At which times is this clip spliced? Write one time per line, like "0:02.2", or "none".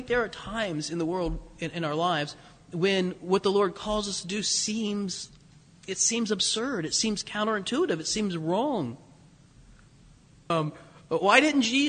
0:10.5